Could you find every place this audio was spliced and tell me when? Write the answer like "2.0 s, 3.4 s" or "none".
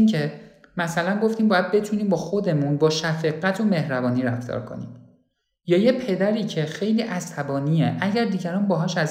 none